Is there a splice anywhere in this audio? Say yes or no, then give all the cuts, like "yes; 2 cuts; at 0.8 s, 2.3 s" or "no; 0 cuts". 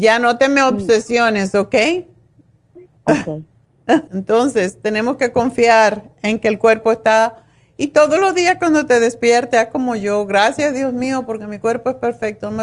yes; 1 cut; at 4.1 s